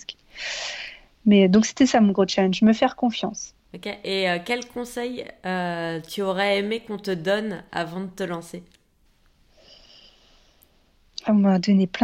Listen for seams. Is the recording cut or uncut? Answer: uncut